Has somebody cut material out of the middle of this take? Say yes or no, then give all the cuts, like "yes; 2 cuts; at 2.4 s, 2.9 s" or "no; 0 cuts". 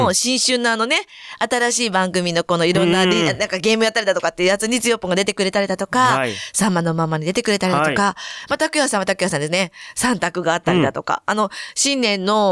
no; 0 cuts